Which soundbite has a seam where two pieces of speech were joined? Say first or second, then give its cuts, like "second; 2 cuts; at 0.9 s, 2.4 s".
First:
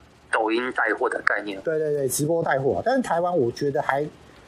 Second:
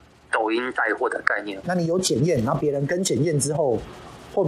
second; 1 cut; at 1.6 s